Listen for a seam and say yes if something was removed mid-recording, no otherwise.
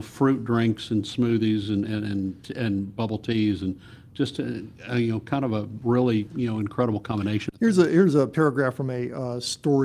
no